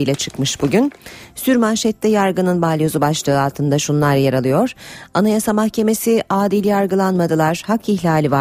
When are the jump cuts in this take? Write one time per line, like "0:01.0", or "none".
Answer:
none